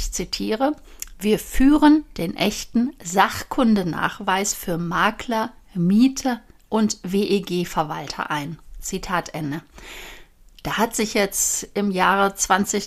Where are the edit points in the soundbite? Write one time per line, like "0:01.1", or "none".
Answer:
none